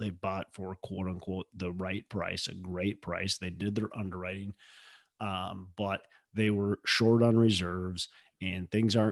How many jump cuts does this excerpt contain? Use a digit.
0